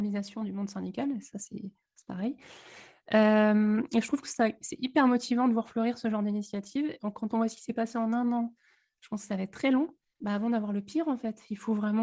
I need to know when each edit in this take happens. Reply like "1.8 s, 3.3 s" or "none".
7.0 s, 10.0 s